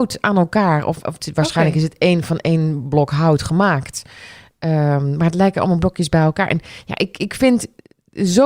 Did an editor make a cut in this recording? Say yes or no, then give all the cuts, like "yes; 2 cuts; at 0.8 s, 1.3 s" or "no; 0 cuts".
no; 0 cuts